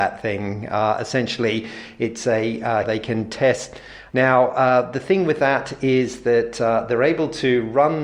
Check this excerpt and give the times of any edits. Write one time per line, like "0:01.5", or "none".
0:02.8
0:04.1

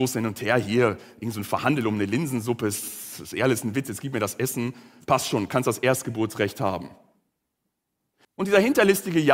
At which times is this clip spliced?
0:08.2

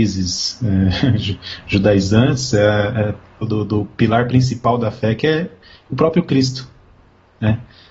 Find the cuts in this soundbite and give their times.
0:03.4

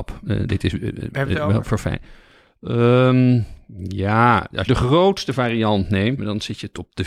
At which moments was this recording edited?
0:04.7
0:06.2

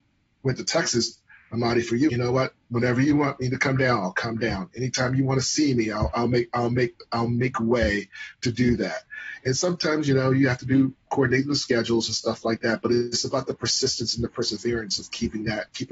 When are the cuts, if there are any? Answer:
0:02.1

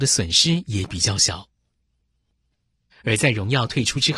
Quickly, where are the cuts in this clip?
0:02.9

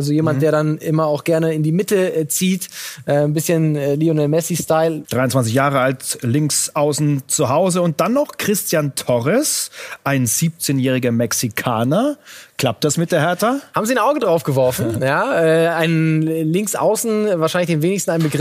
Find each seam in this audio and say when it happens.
0:05.0

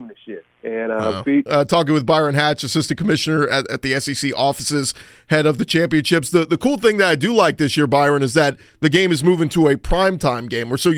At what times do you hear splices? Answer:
0:01.5

